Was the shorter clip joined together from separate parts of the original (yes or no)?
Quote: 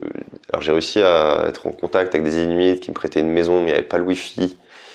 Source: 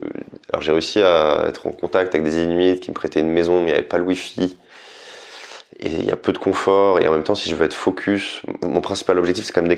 no